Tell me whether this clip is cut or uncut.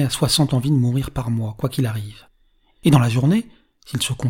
uncut